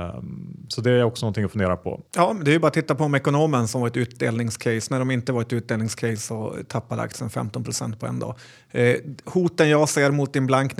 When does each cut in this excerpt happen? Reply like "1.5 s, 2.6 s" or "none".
2.1 s